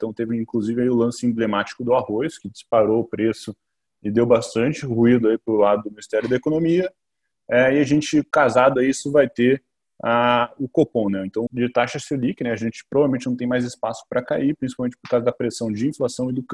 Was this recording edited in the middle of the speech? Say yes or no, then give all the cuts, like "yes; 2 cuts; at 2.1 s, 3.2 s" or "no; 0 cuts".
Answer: yes; 1 cut; at 11.5 s